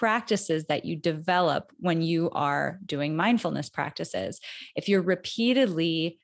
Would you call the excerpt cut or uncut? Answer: uncut